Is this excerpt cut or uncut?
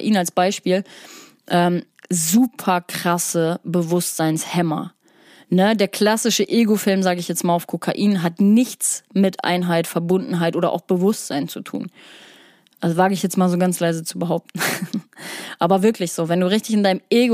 uncut